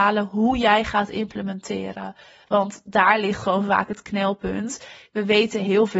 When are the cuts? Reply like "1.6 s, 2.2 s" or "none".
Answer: none